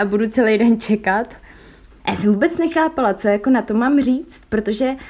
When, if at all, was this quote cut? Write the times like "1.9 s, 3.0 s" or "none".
1.9 s